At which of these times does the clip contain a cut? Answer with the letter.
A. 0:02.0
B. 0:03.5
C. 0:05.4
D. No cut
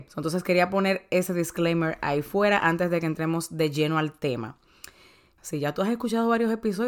C